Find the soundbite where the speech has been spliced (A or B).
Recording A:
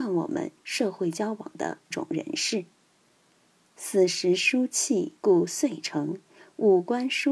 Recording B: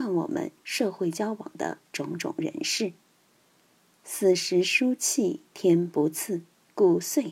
A